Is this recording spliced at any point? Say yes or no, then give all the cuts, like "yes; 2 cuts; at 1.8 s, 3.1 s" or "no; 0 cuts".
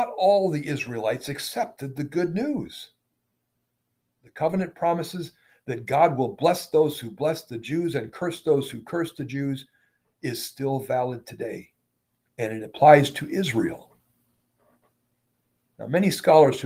yes; 1 cut; at 4.0 s